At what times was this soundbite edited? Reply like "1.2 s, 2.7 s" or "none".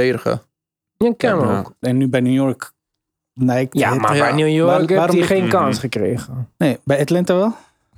1.8 s